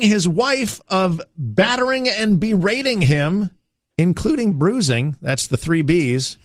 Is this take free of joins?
no; 1 cut; at 4.5 s

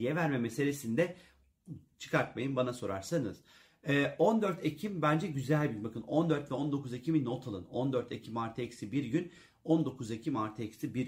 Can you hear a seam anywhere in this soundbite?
no; 0 cuts

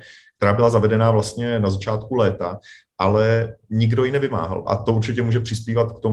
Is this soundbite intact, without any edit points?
no; 1 cut; at 4.7 s

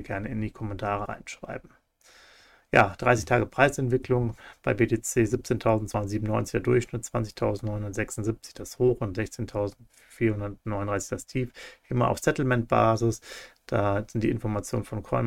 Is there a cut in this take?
yes; 1 cut; at 1.1 s

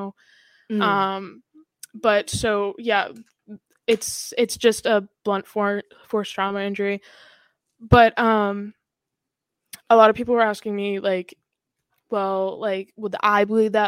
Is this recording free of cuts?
yes; 0 cuts

